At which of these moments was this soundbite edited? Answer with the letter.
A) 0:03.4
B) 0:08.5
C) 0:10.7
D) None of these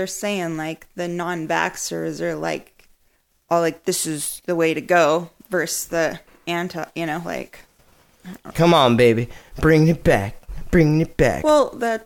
B